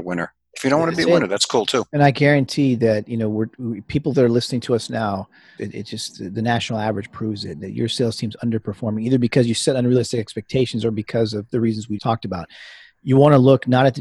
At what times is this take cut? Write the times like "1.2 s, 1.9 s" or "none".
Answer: 5.6 s, 12.0 s